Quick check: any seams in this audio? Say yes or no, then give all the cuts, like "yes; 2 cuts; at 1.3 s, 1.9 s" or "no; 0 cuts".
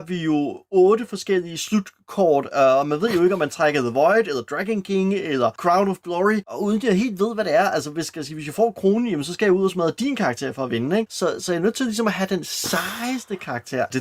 no; 0 cuts